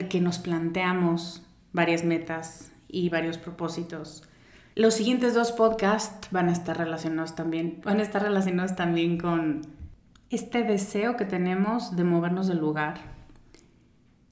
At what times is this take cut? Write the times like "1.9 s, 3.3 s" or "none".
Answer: 4.7 s, 7.8 s

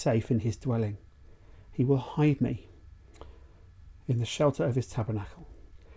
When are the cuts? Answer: 4.0 s

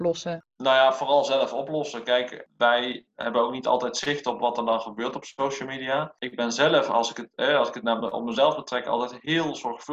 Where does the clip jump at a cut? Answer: none

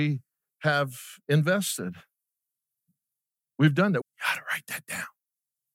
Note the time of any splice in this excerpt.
4.0 s

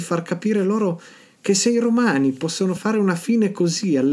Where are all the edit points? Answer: 2.8 s

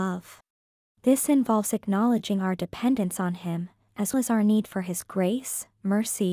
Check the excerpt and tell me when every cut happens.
0.9 s, 4.1 s

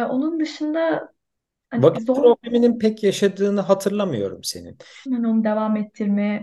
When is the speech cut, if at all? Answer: 5.1 s

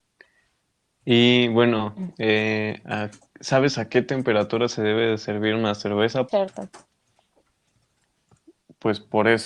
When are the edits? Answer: 6.3 s

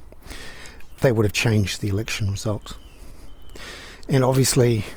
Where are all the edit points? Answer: 0.9 s

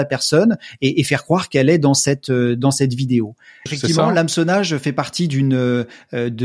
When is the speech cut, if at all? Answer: 3.7 s

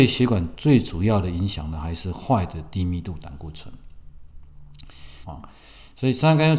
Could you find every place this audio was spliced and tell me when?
5.3 s

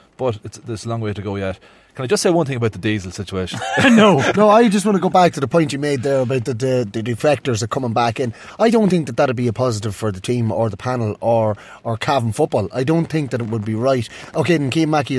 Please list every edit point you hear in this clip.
4.3 s

